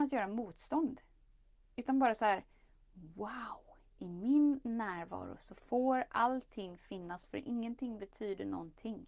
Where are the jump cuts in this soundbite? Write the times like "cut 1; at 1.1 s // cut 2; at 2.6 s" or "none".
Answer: none